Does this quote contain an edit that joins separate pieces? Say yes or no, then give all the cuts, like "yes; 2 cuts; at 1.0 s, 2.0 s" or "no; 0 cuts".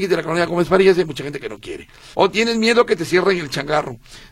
yes; 1 cut; at 2.1 s